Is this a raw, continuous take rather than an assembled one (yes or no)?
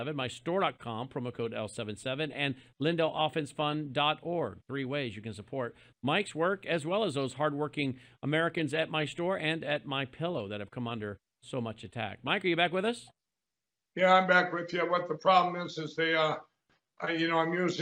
yes